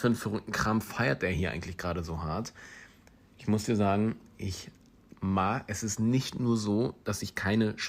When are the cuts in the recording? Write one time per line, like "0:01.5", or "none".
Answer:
none